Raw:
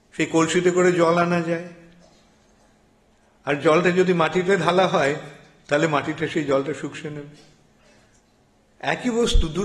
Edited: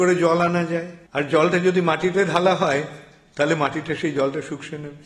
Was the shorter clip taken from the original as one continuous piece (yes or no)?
no